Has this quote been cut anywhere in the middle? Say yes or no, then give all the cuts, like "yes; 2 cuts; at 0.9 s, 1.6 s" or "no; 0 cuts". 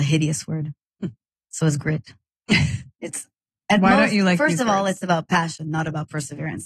no; 0 cuts